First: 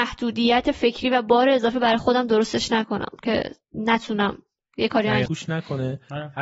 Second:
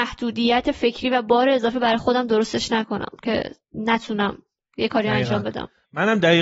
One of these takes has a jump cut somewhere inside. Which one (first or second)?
first